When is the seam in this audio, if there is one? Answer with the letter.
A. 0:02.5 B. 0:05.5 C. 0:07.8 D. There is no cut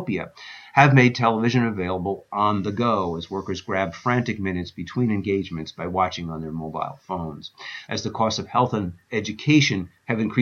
C